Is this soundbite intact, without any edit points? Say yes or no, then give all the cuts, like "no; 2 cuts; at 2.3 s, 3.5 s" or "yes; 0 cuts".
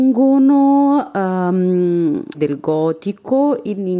no; 1 cut; at 2.3 s